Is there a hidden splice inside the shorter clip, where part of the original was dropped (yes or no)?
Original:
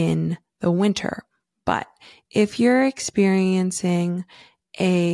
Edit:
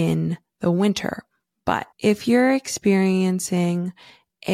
yes